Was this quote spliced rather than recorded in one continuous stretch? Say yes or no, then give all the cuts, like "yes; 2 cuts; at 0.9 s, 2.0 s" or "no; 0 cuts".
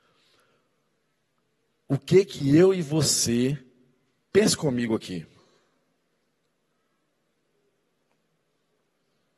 no; 0 cuts